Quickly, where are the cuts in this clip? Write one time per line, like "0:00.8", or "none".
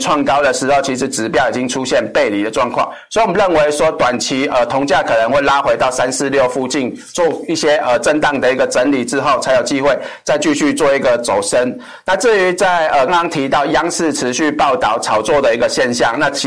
0:13.1